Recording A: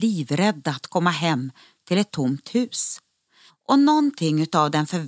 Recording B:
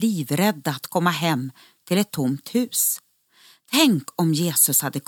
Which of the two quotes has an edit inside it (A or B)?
A